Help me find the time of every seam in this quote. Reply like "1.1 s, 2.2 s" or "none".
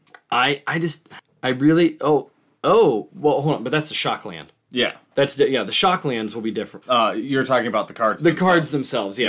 6.8 s